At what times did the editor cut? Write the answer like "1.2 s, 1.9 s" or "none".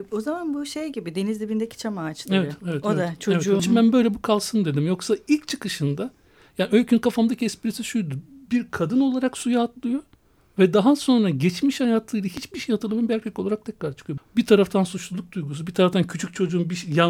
3.6 s, 14.2 s